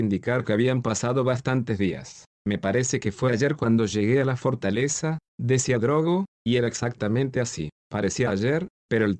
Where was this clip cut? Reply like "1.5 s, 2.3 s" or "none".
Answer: none